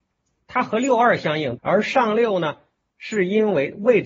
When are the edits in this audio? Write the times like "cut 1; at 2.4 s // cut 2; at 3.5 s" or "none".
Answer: cut 1; at 1.6 s